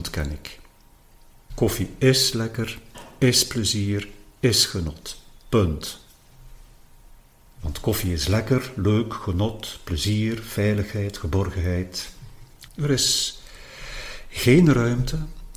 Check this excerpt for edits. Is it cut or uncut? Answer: cut